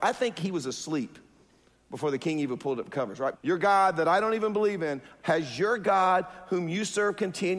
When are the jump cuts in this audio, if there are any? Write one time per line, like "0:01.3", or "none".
0:03.3
0:05.2